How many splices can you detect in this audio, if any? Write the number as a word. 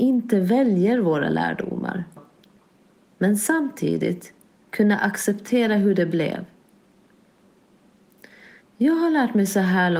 two